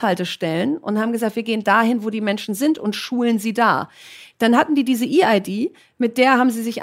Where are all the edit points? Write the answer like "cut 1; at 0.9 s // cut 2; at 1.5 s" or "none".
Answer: none